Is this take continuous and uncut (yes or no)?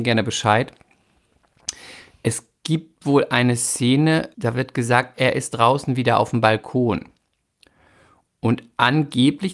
no